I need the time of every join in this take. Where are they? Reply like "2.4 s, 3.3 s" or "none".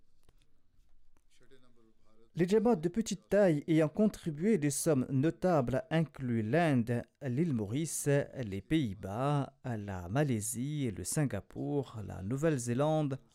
2.3 s